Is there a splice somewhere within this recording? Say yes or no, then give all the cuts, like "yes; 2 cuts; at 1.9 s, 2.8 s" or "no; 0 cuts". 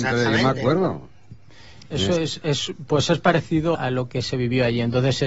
yes; 1 cut; at 3.7 s